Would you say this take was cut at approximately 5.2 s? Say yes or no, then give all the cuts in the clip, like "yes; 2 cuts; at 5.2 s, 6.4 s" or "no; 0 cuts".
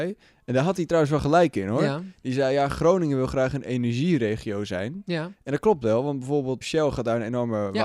no; 1 cut; at 6.6 s